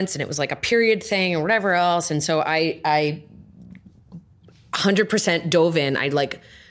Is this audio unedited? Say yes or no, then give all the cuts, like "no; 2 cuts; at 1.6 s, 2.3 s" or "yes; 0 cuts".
yes; 0 cuts